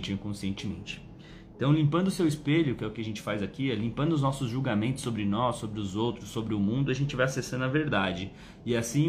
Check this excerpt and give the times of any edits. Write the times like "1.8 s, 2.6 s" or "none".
none

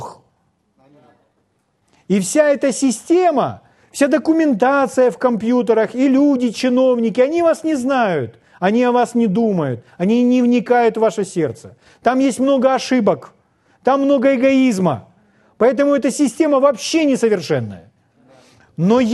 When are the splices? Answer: 3.8 s

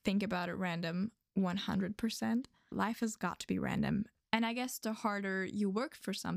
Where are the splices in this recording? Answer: 2.7 s, 4.2 s

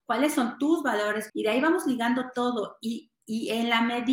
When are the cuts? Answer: 1.3 s

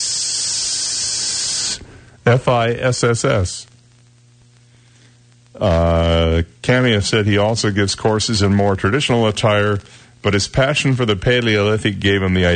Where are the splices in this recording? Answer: none

